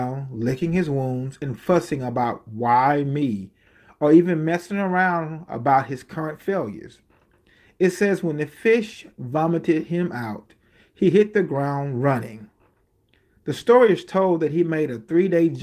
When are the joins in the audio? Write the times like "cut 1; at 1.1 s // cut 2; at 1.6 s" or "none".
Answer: none

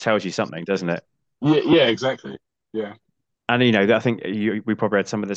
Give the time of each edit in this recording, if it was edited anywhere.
none

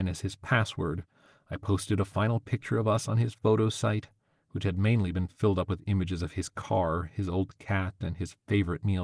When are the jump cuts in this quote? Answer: none

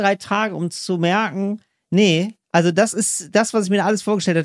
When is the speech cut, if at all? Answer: cut 1; at 2.4 s

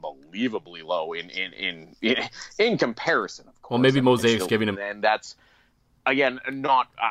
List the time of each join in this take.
cut 1; at 4.7 s

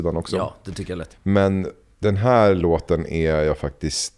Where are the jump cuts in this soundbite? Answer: cut 1; at 1.1 s

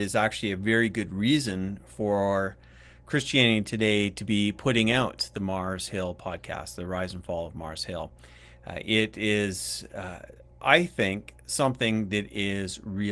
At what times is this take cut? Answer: none

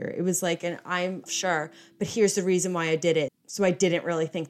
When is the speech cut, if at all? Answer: cut 1; at 1.3 s // cut 2; at 3.3 s

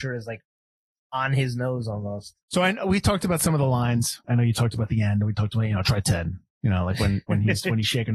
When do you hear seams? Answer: cut 1; at 2.4 s // cut 2; at 4.2 s

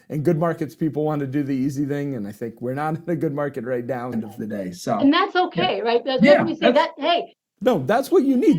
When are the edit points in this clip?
cut 1; at 4.1 s

